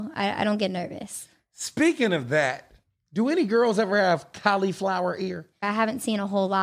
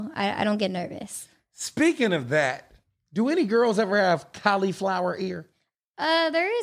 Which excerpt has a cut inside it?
first; 1 cut; at 5.6 s

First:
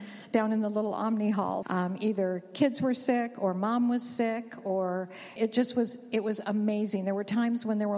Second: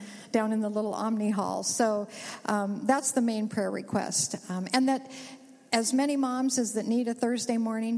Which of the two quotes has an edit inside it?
first; 2 cuts; at 1.6 s, 5.4 s

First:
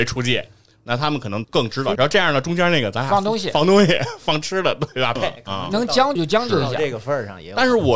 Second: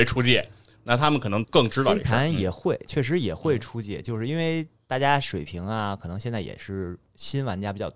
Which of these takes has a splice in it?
first; 3 cuts; at 2.0 s, 5.2 s, 6.2 s

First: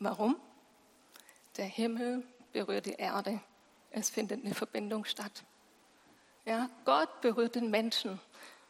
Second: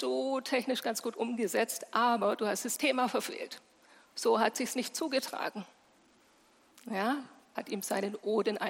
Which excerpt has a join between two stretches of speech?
second; 1 cut; at 7.5 s

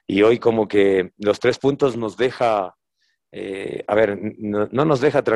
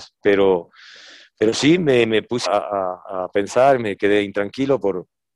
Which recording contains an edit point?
second; 1 cut; at 2.5 s

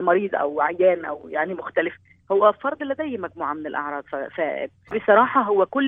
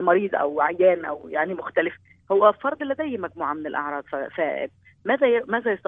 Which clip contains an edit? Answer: first; 1 cut; at 4.9 s

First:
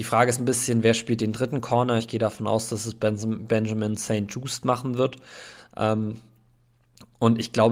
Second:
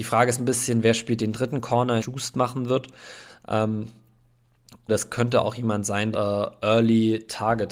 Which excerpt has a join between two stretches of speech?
second; 3 cuts; at 2.0 s, 4.9 s, 6.1 s

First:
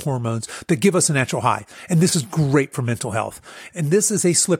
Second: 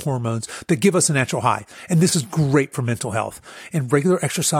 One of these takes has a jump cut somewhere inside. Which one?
first; 1 cut; at 3.7 s

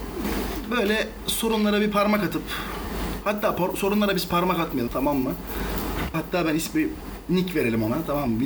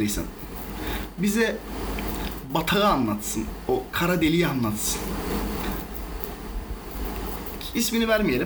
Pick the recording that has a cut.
first; 2 cuts; at 4.9 s, 6.1 s

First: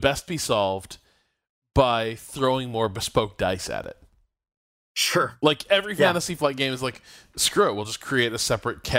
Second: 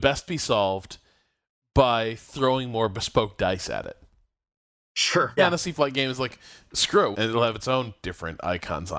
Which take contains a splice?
second; 2 cuts; at 5.4 s, 7.1 s

